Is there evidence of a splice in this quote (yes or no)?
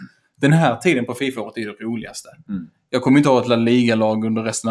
no